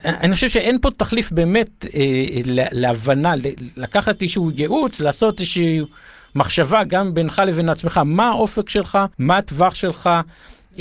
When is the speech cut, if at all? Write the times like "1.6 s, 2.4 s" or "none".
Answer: 9.1 s